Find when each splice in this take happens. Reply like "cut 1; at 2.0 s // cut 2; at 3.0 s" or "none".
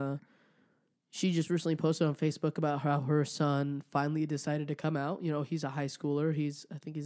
none